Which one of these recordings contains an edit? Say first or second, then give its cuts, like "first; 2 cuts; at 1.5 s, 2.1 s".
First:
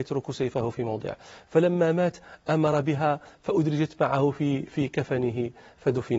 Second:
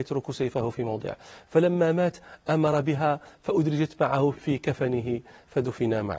second; 1 cut; at 4.3 s